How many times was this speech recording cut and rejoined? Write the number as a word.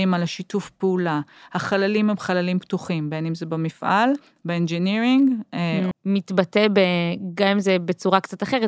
one